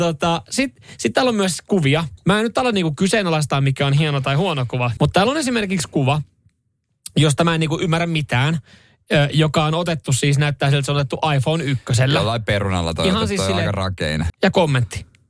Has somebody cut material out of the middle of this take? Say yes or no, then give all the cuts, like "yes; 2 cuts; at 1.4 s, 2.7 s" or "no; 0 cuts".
yes; 2 cuts; at 5.0 s, 14.3 s